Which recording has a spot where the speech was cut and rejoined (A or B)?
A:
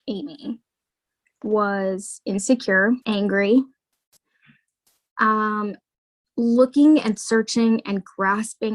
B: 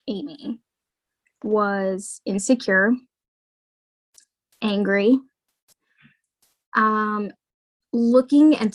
A